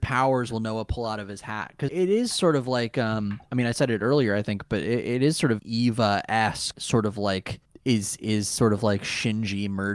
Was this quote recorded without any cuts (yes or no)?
no